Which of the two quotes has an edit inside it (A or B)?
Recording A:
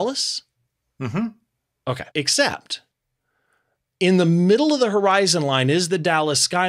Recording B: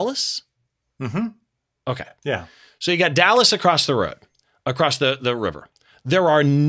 A